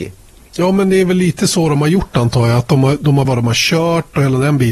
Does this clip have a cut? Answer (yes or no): yes